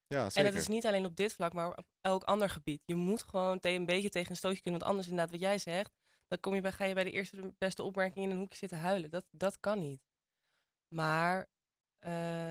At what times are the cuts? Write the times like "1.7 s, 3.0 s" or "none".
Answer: none